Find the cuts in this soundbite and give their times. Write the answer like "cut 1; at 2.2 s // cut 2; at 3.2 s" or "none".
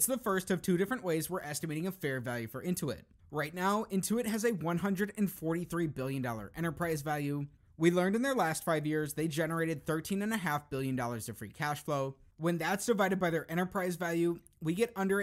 cut 1; at 12.3 s